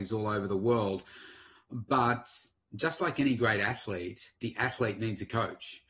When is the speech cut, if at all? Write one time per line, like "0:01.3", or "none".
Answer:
0:04.4